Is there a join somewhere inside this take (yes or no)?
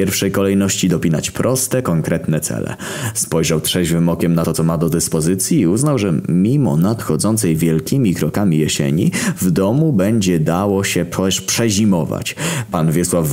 no